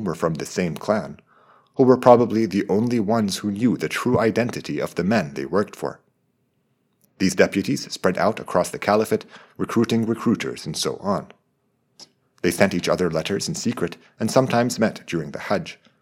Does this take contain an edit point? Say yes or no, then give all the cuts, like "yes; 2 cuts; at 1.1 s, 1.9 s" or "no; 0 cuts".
no; 0 cuts